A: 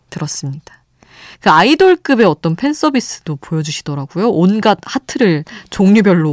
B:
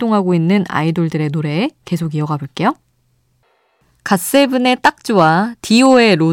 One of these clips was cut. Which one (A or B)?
A